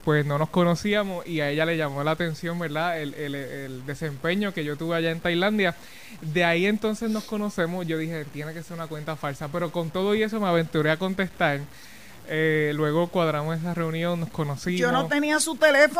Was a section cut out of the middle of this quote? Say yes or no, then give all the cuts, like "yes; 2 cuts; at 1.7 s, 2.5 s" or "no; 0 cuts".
no; 0 cuts